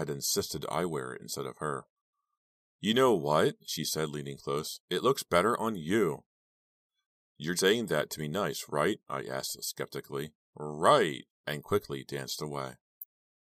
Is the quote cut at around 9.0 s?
no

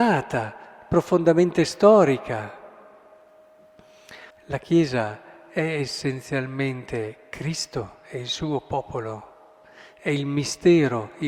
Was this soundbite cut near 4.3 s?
yes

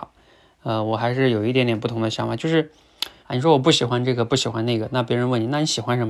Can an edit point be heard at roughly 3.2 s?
yes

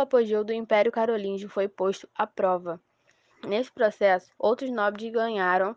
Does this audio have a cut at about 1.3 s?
no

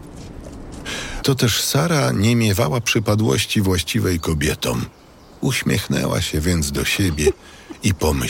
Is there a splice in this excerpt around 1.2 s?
yes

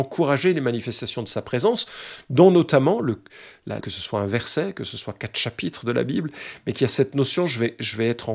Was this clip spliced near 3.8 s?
yes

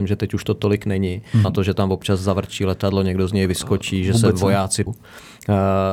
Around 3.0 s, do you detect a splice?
no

